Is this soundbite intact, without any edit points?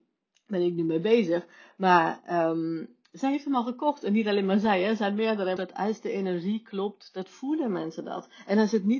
no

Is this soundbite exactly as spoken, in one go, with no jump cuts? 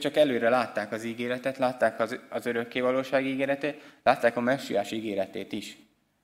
yes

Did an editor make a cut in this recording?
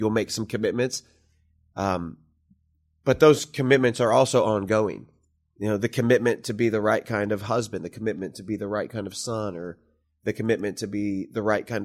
yes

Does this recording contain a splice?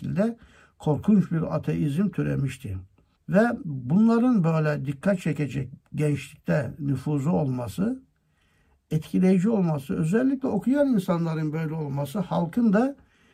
yes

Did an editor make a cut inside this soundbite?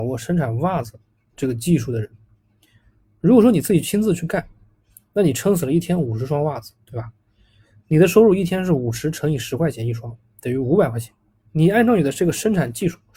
yes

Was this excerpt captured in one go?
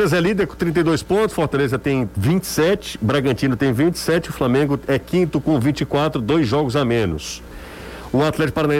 no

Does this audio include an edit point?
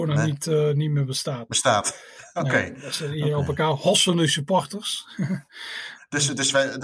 no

